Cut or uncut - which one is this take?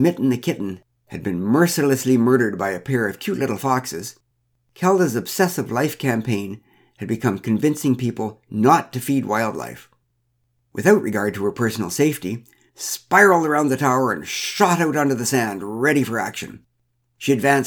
cut